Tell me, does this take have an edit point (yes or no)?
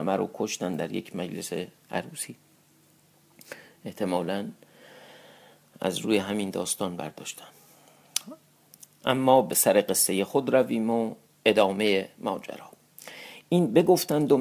no